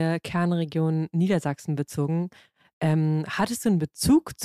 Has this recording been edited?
no; 0 cuts

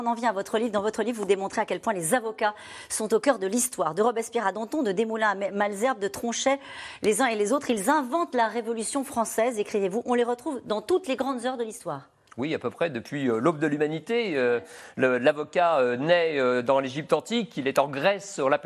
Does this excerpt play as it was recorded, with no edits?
yes; 0 cuts

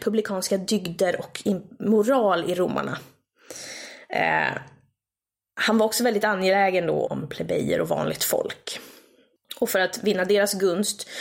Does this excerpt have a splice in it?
yes; 1 cut; at 7.1 s

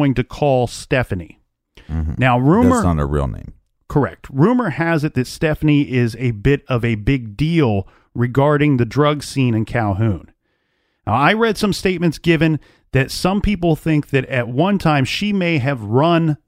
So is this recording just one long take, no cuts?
yes; 0 cuts

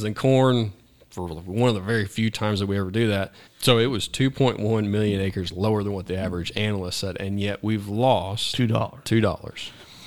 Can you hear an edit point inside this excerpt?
yes; 1 cut; at 3.5 s

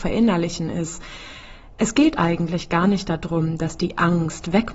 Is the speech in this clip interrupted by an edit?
no; 0 cuts

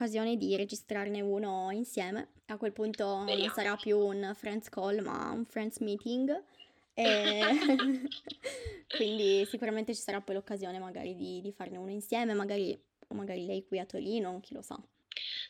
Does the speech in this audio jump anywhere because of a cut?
yes; 1 cut; at 2.4 s

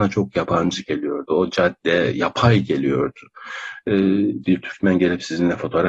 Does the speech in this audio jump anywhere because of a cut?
yes; 1 cut; at 4.4 s

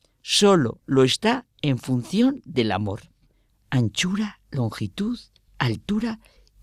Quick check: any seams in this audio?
yes; 1 cut; at 3.5 s

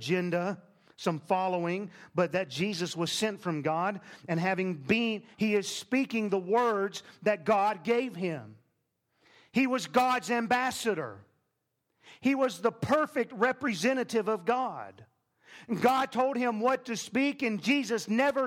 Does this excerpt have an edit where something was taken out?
yes; 1 cut; at 5.3 s

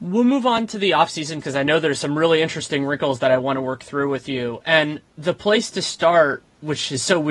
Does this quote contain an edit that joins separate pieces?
yes; 1 cut; at 1.4 s

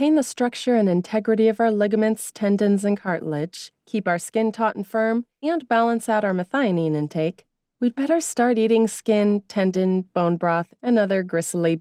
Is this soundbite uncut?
yes; 0 cuts

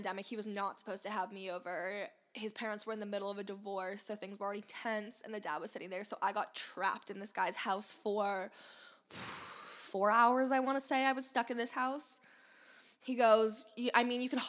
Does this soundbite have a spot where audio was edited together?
no; 0 cuts

